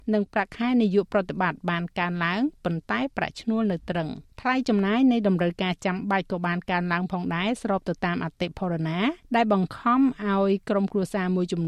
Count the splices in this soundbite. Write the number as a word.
two